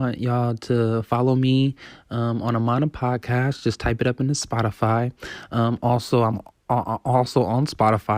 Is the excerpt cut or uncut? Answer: uncut